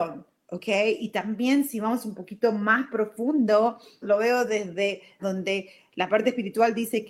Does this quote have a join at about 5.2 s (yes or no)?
yes